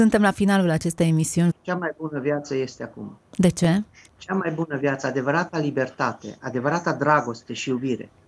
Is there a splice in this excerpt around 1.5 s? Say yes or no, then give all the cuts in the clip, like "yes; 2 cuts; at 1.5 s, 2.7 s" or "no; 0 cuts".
yes; 1 cut; at 1.5 s